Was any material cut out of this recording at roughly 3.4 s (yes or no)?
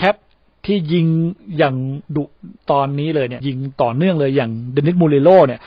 yes